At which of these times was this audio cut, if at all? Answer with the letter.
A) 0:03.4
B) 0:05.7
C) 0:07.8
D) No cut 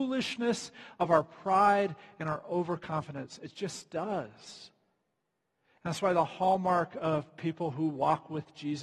D